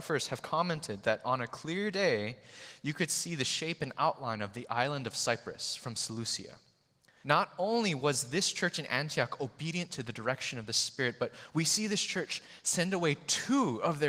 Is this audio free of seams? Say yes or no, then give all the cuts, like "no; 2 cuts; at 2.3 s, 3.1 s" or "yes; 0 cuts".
no; 1 cut; at 7.2 s